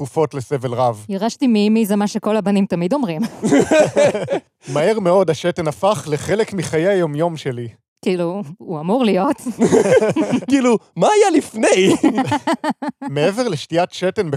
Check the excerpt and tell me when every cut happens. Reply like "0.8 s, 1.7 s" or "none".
none